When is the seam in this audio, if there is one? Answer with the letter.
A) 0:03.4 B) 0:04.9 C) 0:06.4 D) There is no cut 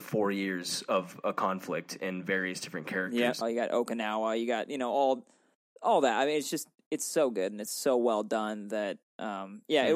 A